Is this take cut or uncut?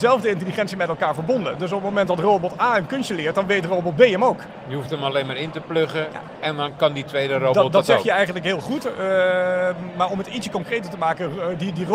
uncut